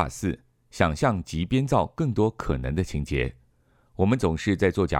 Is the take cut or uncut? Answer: uncut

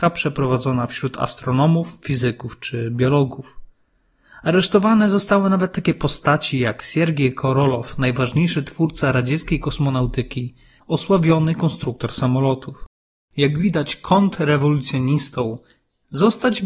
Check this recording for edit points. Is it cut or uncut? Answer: cut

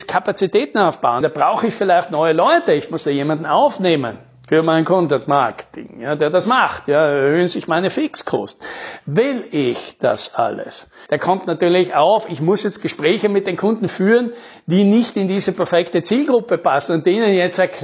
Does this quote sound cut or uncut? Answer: cut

